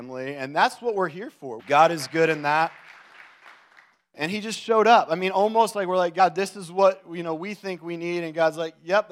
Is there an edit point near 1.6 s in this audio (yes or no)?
yes